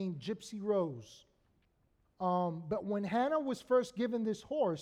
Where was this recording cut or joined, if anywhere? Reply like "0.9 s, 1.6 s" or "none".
2.0 s